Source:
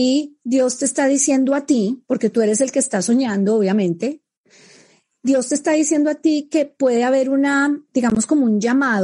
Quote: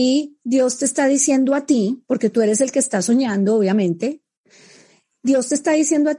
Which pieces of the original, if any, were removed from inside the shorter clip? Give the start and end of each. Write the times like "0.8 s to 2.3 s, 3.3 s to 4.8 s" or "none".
none